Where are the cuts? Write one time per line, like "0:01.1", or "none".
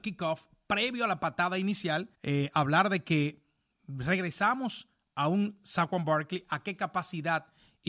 0:02.1